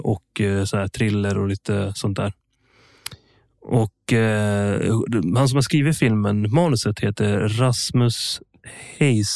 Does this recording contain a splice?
no; 0 cuts

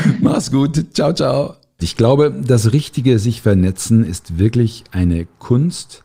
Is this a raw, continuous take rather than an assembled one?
no; 1 cut; at 1.8 s

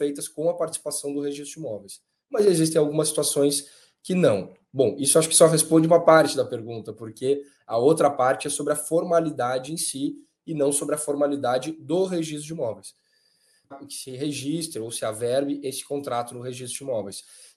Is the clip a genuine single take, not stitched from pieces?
no; 1 cut; at 13.7 s

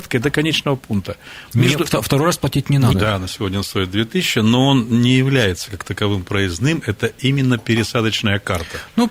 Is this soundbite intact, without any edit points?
no; 1 cut; at 2.9 s

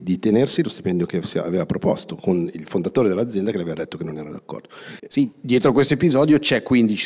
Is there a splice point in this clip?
yes; 1 cut; at 5.0 s

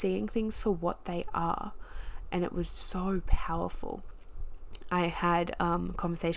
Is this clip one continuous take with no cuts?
yes; 0 cuts

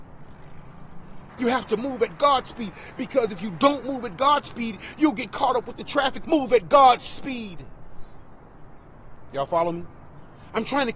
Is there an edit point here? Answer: yes; 3 cuts; at 1.3 s, 6.2 s, 9.3 s

